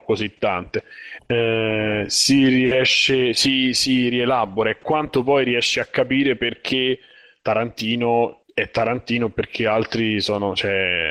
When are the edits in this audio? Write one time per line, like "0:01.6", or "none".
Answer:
0:01.2